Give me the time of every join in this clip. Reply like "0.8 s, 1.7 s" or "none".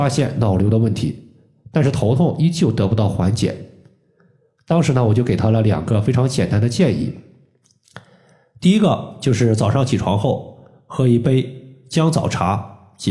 none